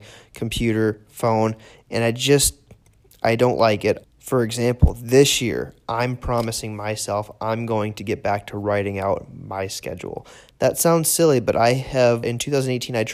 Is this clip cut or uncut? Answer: cut